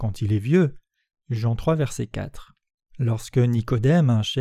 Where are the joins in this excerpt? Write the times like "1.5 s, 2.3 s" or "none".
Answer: 2.8 s